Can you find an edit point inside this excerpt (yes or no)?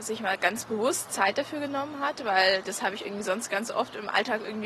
no